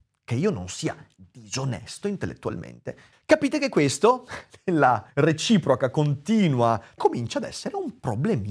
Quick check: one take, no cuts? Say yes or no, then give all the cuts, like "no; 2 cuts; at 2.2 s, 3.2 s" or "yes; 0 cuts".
no; 3 cuts; at 3.1 s, 5.1 s, 7.0 s